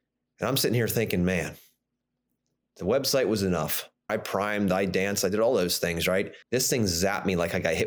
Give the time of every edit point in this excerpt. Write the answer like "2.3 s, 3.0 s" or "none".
4.1 s, 6.4 s